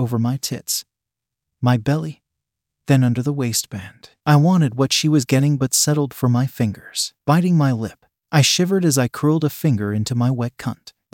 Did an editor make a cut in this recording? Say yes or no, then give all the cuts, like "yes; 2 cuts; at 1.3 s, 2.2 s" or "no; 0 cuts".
no; 0 cuts